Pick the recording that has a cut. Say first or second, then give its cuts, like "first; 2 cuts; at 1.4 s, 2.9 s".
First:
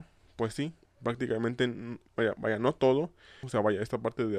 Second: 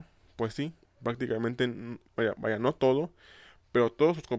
first; 1 cut; at 3.4 s